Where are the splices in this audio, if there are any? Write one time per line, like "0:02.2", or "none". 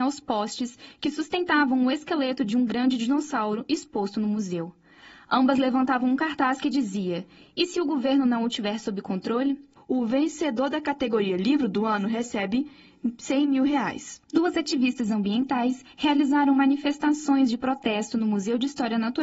0:09.8
0:14.2